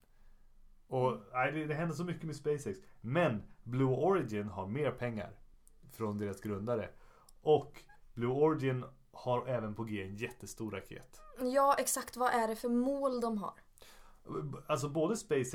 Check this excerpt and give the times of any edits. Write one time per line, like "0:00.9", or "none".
none